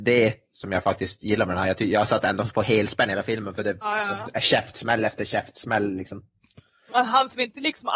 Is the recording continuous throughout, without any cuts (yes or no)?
yes